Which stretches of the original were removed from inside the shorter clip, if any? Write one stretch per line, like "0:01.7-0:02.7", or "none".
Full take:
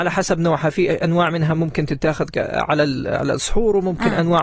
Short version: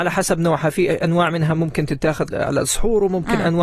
0:02.3-0:03.0